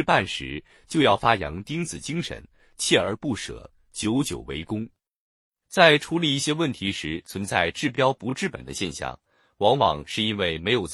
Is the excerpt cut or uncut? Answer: cut